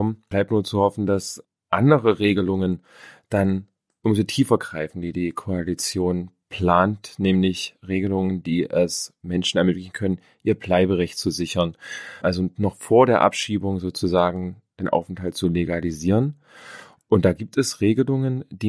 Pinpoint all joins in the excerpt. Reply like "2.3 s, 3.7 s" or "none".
none